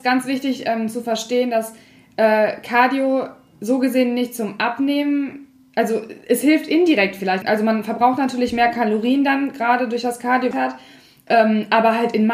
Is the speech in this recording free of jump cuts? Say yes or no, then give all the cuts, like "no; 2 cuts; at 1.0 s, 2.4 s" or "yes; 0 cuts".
no; 2 cuts; at 7.4 s, 10.5 s